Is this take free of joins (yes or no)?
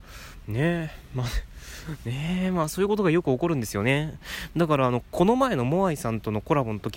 yes